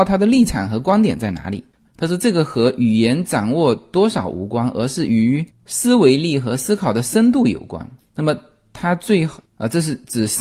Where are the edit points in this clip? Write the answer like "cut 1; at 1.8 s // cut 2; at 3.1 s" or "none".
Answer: cut 1; at 1.9 s